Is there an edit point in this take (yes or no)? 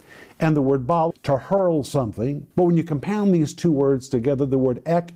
yes